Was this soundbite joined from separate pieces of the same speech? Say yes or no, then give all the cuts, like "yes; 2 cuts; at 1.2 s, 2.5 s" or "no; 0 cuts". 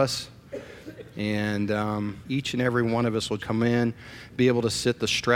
yes; 2 cuts; at 2.2 s, 3.4 s